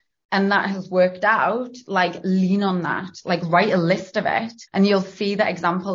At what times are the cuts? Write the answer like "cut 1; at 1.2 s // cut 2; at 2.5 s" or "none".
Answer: cut 1; at 4.7 s